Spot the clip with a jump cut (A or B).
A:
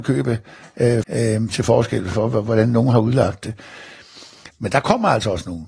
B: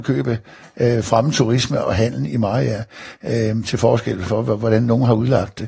A